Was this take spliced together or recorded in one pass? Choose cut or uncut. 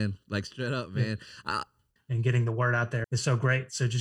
cut